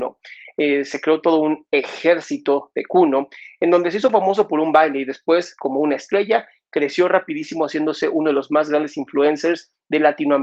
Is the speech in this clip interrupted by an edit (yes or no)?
no